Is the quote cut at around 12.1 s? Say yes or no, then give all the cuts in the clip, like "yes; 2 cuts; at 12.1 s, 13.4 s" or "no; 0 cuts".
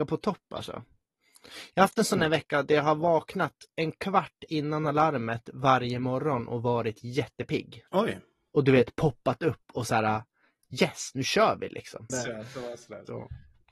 yes; 2 cuts; at 7.9 s, 12.1 s